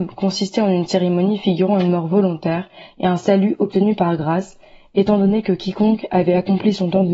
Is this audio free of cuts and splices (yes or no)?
yes